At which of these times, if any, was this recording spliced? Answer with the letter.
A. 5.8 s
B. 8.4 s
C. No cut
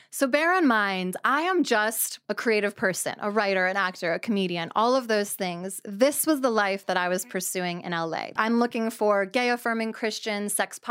B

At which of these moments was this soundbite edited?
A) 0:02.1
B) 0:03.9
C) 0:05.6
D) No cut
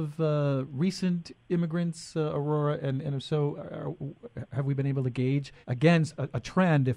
C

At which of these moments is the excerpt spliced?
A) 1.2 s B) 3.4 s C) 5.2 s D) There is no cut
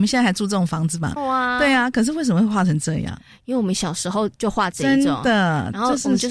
A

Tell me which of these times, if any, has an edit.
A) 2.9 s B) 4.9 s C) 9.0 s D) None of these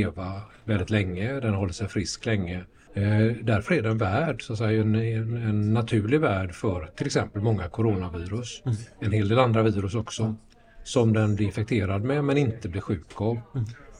A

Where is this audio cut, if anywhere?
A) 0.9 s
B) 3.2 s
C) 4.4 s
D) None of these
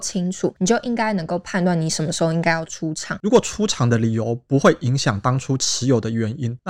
B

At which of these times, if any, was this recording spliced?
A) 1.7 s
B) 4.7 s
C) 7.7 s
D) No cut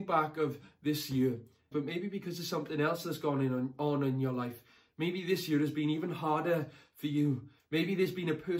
A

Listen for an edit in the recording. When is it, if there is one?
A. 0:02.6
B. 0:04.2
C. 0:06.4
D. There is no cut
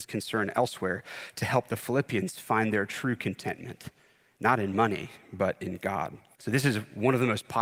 C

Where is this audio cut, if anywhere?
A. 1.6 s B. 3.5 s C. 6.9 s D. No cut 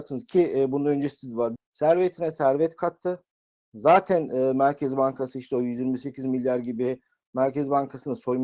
A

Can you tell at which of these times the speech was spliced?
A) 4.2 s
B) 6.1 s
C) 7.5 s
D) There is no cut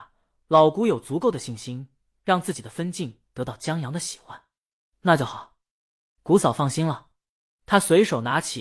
D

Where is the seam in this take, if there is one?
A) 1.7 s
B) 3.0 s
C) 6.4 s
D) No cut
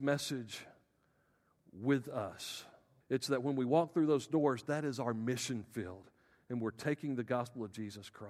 B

